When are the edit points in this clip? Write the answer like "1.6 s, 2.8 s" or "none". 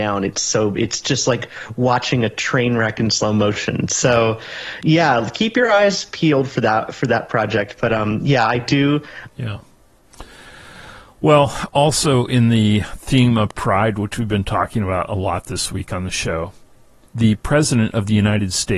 9.3 s, 17.1 s